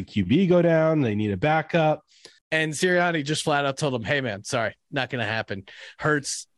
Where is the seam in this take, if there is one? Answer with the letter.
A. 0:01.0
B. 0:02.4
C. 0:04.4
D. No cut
B